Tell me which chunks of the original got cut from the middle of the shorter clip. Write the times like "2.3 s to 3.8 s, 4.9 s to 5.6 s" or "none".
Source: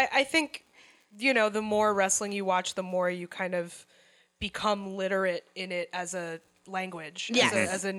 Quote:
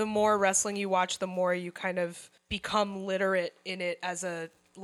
3.9 s to 4.3 s